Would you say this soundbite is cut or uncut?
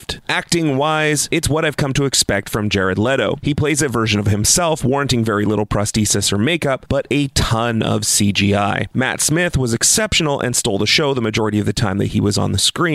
cut